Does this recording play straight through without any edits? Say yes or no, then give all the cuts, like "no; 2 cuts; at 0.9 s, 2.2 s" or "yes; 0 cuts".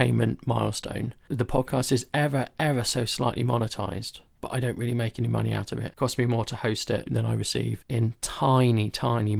yes; 0 cuts